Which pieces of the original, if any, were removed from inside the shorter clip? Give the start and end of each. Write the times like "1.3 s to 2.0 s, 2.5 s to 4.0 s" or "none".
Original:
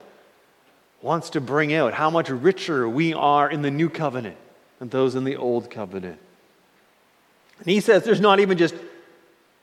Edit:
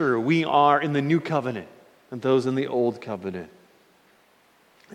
none